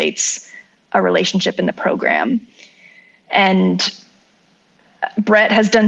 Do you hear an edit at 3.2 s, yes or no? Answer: no